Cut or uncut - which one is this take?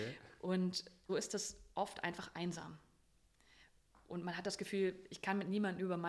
cut